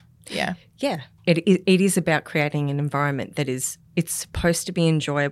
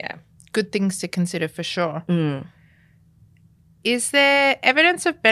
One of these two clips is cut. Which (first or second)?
first